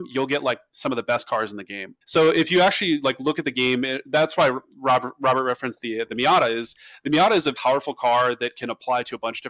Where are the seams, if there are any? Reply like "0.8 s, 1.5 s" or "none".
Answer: 2.0 s, 7.5 s